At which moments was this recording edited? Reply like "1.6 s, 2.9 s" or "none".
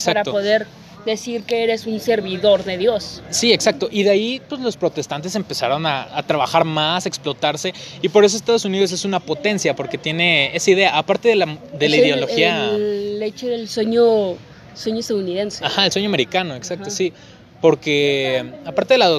none